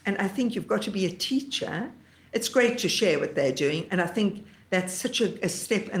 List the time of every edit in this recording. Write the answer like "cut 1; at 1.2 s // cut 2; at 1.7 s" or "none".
cut 1; at 3.9 s

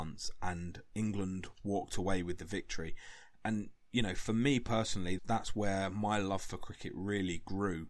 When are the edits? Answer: cut 1; at 5.2 s

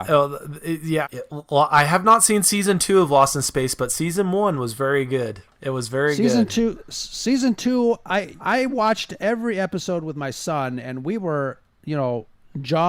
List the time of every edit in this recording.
cut 1; at 1.0 s // cut 2; at 8.4 s

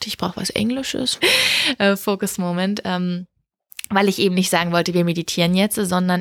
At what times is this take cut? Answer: cut 1; at 1.2 s

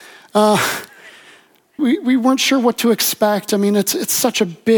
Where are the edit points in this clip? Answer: cut 1; at 1.8 s

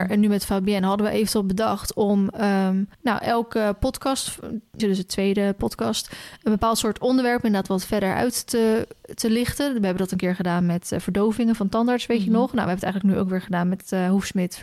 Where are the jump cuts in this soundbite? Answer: cut 1; at 2.9 s // cut 2; at 4.8 s

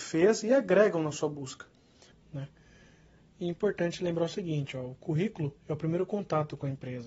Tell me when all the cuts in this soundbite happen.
cut 1; at 2.1 s // cut 2; at 5.6 s

